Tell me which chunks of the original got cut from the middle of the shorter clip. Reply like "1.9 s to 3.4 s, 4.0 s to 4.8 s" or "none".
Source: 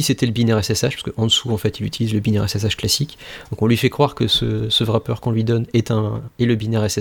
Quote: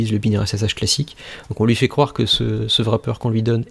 none